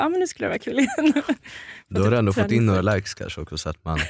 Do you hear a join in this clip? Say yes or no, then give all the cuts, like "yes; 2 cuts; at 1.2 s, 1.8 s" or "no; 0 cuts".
no; 0 cuts